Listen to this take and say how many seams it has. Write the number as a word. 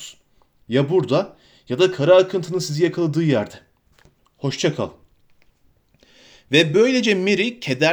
zero